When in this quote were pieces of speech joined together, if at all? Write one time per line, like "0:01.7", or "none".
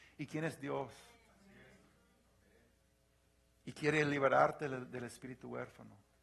none